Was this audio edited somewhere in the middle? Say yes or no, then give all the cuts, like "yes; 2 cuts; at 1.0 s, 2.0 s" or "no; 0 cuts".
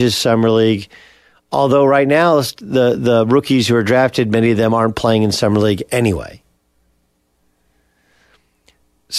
no; 0 cuts